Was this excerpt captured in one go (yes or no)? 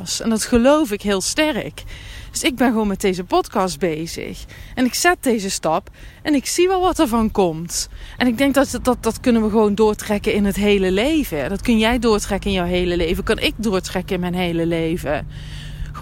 no